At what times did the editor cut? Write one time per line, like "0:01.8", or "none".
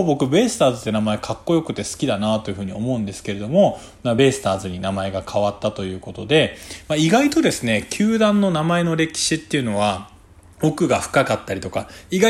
none